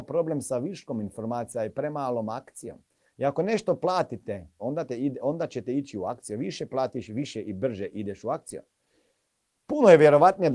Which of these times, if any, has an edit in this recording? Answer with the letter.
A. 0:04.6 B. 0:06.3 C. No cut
A